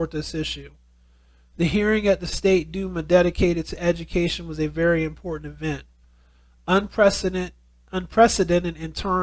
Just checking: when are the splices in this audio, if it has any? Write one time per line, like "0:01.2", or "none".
none